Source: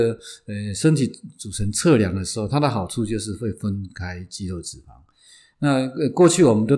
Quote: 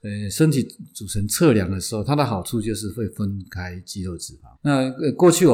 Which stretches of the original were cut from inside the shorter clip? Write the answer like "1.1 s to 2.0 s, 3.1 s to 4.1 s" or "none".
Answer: 5.0 s to 5.5 s